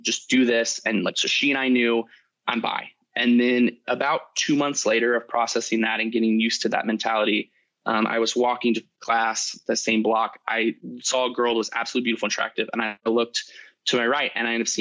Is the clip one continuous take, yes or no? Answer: yes